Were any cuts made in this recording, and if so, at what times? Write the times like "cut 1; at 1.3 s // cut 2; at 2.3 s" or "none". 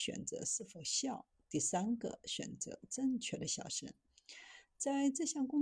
none